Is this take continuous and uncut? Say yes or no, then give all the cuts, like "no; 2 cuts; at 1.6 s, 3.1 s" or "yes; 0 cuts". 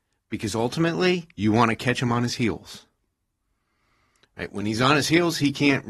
yes; 0 cuts